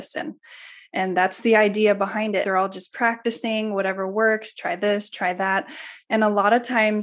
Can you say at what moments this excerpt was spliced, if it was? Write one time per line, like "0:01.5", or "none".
0:02.4

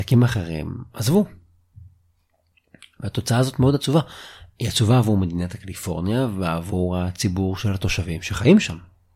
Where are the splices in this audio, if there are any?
none

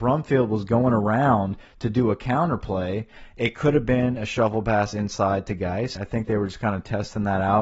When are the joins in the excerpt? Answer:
0:06.0

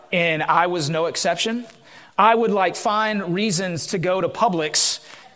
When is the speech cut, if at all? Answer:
none

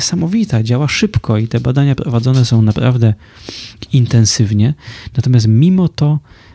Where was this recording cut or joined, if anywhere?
none

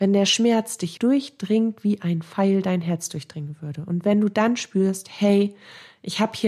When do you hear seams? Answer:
0:01.0

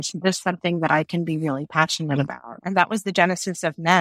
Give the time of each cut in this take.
none

